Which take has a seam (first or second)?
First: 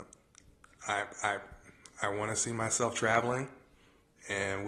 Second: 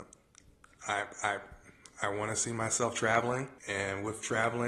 second